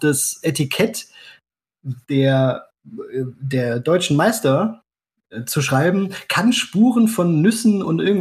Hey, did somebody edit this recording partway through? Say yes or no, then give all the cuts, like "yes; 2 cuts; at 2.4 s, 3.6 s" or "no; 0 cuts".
no; 0 cuts